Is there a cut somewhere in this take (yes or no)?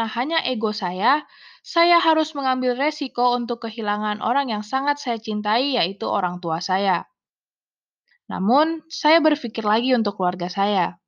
yes